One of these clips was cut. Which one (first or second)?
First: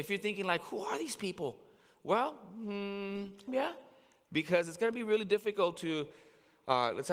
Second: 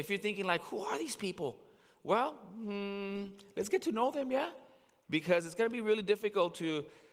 first